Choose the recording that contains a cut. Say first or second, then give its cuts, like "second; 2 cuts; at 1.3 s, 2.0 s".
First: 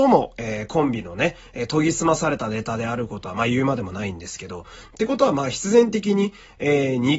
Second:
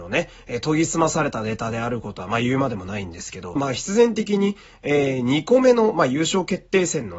second; 1 cut; at 3.6 s